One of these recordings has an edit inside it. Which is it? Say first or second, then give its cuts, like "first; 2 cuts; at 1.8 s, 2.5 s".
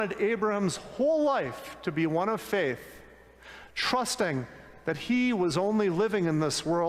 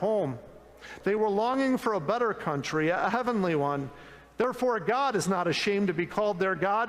second; 1 cut; at 1.0 s